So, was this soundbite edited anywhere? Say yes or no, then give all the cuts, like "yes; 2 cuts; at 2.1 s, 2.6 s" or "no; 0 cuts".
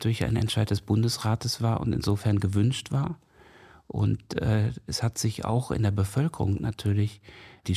no; 0 cuts